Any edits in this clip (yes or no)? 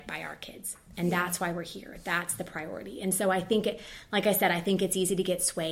no